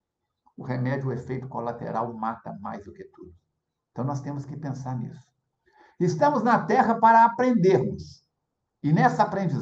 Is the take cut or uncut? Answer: uncut